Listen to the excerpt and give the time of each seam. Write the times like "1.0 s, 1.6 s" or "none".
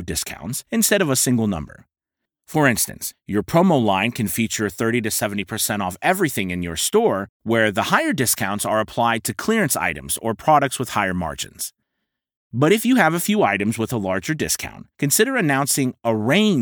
12.4 s